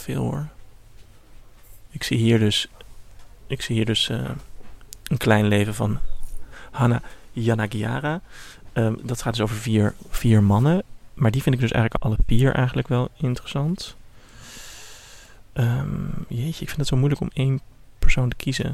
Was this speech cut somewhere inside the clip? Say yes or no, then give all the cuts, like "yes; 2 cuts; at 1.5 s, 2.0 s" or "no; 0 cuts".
yes; 1 cut; at 9.0 s